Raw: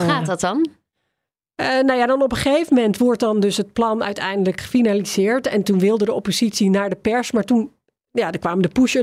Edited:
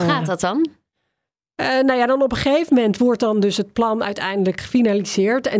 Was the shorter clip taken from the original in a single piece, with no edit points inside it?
yes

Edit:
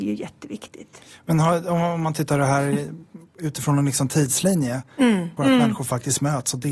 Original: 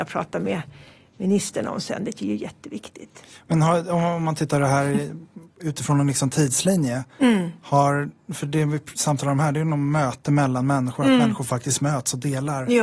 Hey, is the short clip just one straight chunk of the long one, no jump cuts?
no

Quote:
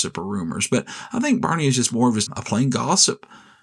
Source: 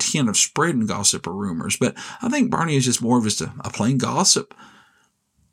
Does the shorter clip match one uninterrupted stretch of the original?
no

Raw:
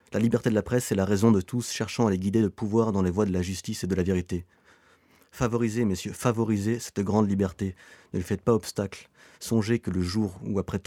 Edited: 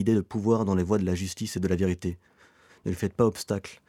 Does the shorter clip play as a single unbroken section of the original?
no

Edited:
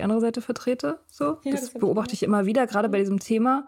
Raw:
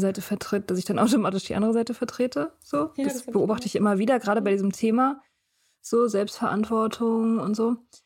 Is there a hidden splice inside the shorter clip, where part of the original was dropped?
no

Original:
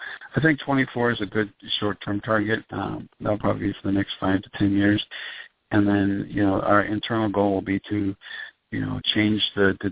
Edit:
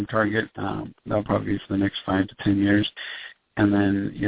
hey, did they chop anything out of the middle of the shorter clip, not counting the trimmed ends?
no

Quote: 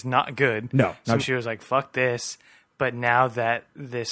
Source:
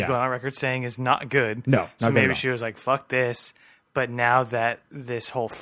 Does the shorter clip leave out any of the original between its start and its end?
yes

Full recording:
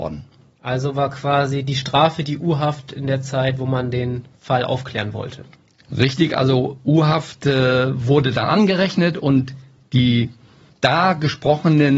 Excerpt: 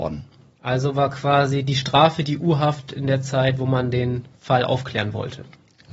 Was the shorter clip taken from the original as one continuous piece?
yes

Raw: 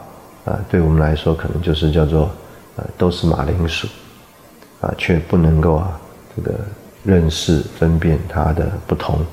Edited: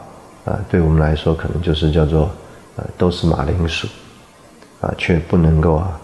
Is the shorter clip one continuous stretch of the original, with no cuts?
yes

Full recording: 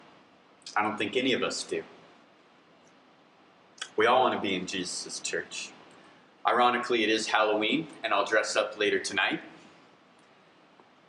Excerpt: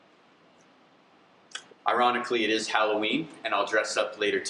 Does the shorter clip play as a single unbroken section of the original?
no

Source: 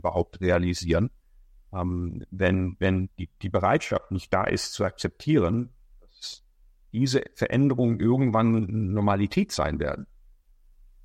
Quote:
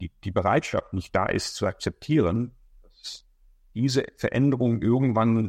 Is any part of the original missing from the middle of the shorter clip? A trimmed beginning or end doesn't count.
no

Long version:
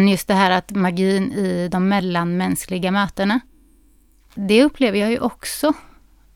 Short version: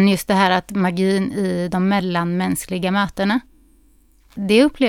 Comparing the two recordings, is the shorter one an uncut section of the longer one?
yes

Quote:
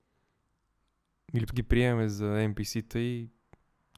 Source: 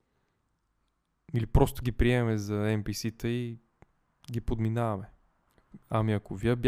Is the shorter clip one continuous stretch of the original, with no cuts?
no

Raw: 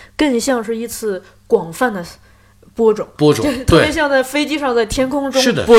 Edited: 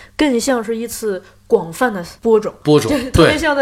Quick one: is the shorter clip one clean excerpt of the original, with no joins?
no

